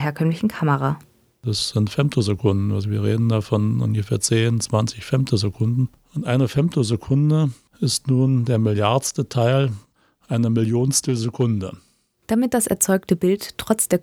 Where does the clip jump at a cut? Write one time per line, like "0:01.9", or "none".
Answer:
none